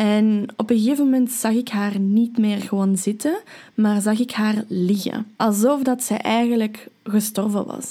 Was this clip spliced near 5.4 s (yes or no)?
yes